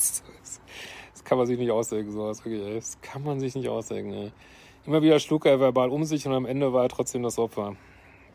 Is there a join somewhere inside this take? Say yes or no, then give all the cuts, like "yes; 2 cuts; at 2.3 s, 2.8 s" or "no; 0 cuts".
no; 0 cuts